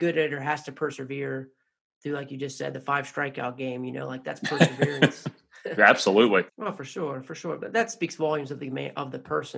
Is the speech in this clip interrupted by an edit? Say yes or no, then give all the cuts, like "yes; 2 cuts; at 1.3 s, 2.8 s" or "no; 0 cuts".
yes; 1 cut; at 6.5 s